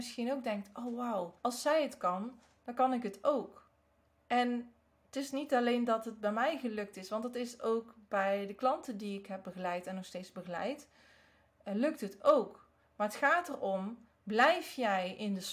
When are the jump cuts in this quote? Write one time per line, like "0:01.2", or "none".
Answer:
0:01.4